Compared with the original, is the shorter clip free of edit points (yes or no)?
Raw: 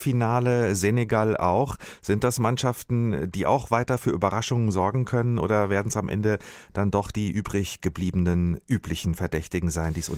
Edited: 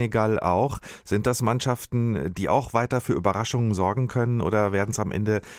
yes